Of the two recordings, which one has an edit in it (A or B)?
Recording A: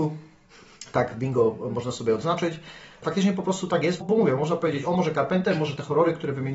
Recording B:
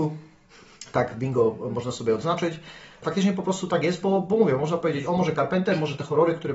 A